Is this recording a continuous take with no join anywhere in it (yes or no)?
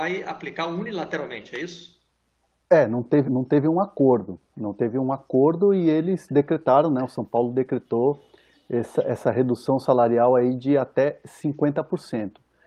no